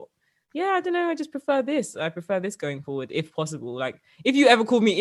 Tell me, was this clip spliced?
no; 0 cuts

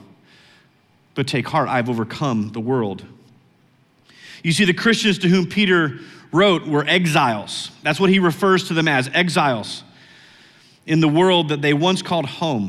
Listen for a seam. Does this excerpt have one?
no; 0 cuts

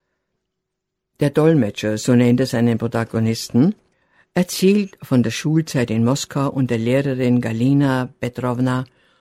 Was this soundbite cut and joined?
no; 0 cuts

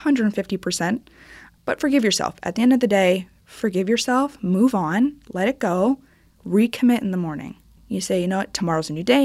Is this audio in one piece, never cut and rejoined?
yes; 0 cuts

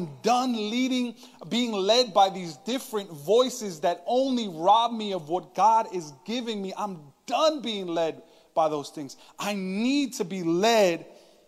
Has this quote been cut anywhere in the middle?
no; 0 cuts

